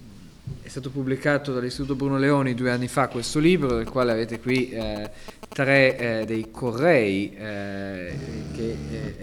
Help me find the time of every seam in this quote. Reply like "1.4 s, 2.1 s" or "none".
none